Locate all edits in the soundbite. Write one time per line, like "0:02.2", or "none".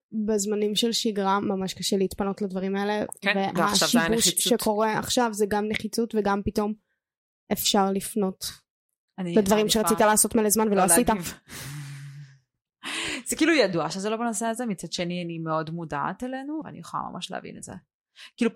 0:16.6

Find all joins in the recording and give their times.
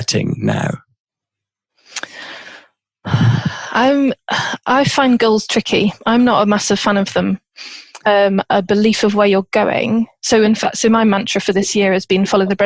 0:08.0

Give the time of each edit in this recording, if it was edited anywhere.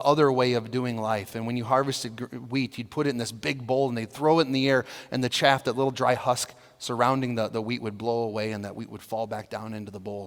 none

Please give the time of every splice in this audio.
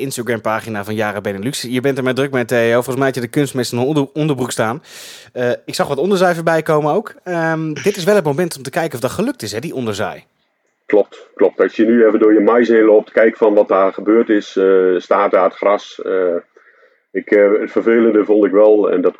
none

